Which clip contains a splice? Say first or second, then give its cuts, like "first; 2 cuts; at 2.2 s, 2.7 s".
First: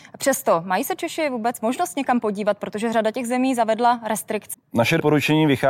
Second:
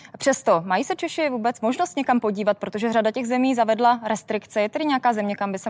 first; 1 cut; at 4.5 s